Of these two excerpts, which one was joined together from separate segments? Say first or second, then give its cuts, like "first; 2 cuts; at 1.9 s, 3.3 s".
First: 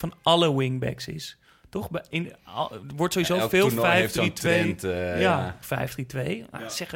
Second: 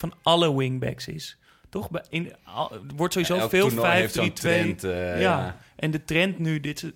first; 1 cut; at 5.6 s